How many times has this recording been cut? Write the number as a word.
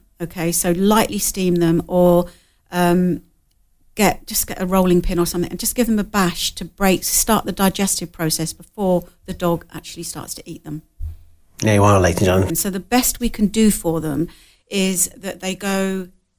one